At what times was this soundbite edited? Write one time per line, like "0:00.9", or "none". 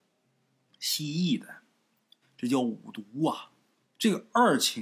0:02.2
0:03.8